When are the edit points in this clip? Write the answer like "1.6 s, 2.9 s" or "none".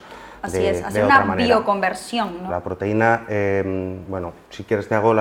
2.5 s